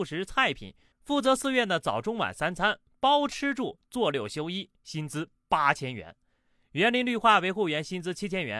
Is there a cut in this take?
no; 0 cuts

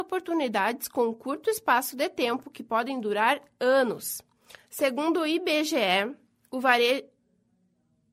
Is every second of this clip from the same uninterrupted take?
no; 1 cut; at 4.5 s

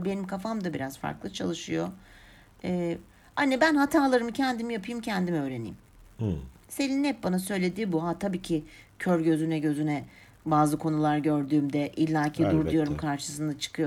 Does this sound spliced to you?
no; 0 cuts

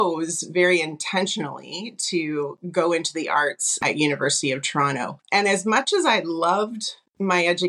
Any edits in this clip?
no; 0 cuts

